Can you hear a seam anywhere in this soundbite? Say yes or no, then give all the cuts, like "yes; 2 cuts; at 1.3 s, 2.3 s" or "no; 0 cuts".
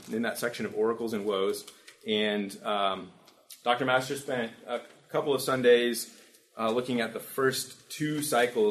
no; 0 cuts